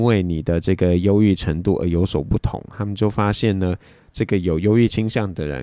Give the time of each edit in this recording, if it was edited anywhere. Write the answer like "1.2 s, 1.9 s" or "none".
none